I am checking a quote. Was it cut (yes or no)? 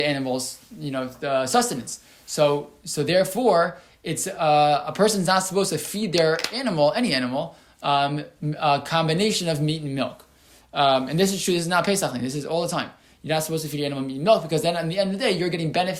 no